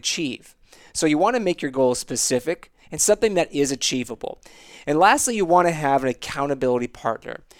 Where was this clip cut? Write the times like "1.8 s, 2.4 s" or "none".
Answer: 2.8 s